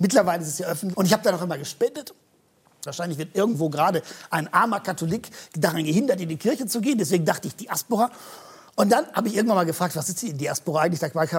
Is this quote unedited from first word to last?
no; 2 cuts; at 0.9 s, 2.9 s

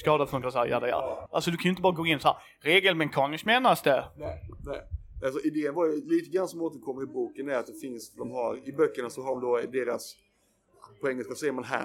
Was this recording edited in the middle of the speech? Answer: yes; 1 cut; at 1.3 s

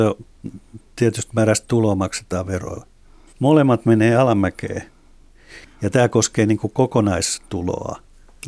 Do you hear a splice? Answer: yes; 2 cuts; at 3.3 s, 5.6 s

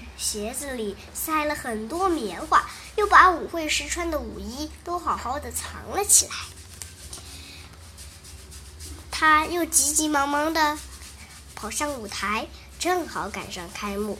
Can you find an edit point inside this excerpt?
no; 0 cuts

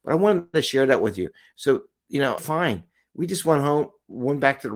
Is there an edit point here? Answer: yes; 1 cut; at 2.4 s

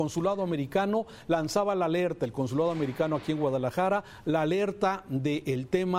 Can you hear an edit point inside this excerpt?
no; 0 cuts

